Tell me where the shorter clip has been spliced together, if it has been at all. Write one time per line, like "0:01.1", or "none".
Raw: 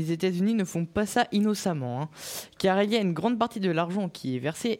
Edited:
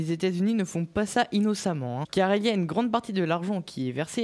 0:02.0